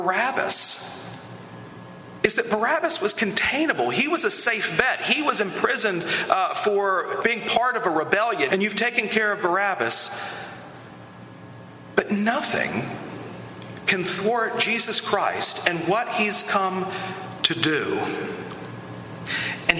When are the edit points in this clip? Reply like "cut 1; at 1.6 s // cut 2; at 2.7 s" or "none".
cut 1; at 7.2 s // cut 2; at 8.5 s